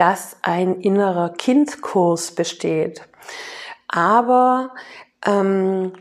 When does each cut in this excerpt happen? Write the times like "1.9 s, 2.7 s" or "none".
3.8 s